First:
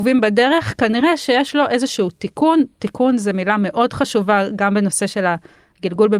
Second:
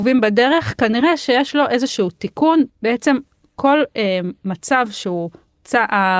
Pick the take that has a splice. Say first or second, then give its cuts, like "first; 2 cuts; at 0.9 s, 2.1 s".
second; 1 cut; at 2.7 s